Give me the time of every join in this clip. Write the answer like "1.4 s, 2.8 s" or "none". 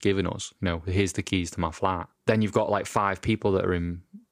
none